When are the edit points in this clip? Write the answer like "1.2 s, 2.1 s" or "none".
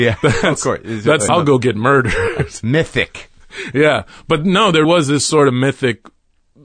1.3 s, 4.8 s